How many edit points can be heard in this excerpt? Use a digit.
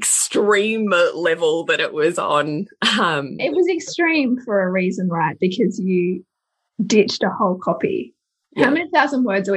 1